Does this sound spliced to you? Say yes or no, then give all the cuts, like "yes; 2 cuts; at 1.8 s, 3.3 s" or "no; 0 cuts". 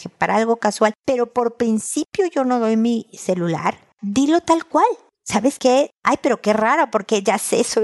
yes; 1 cut; at 5.9 s